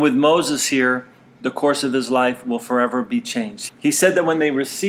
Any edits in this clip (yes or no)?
yes